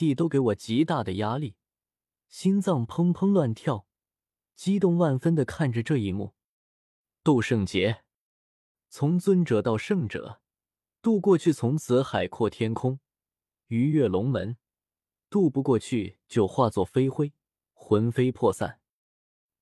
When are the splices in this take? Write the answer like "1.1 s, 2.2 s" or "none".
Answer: none